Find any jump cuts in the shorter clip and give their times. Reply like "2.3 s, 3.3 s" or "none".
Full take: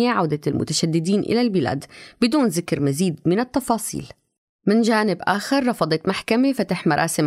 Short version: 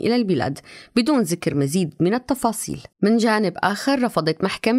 2.9 s